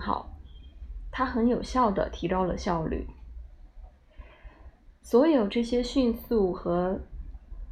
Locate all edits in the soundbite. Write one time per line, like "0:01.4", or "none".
none

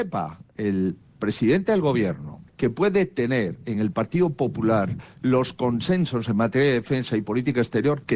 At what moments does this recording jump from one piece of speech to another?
0:02.5

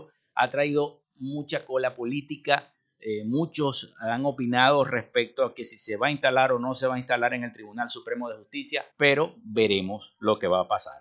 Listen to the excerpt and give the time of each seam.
0:08.9

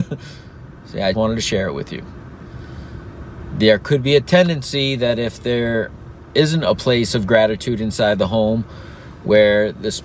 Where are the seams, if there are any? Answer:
0:01.1

